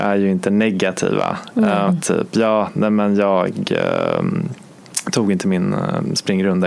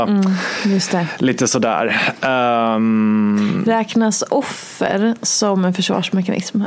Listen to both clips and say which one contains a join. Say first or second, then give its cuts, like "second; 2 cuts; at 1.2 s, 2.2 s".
first; 1 cut; at 1.9 s